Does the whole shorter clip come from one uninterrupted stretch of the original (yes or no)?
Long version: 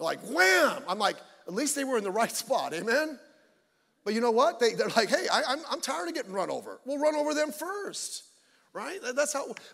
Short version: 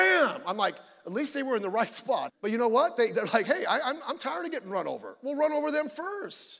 no